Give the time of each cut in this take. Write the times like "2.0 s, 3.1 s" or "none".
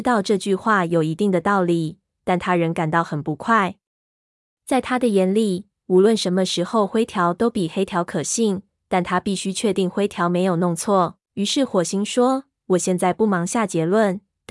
11.3 s